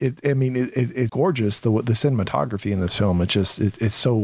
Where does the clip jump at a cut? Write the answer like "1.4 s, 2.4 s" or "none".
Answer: 1.1 s